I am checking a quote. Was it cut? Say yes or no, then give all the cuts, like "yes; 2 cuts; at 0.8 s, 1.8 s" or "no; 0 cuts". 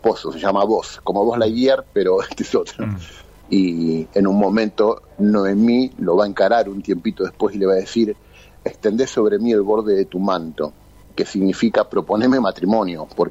yes; 1 cut; at 3.4 s